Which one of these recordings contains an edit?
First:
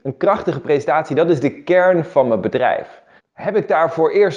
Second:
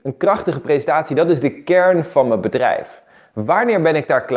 first; 1 cut; at 3.2 s

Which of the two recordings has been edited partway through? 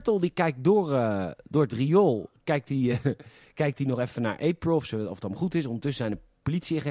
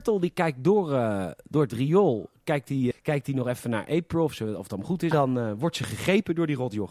second; 2 cuts; at 2.9 s, 5.1 s

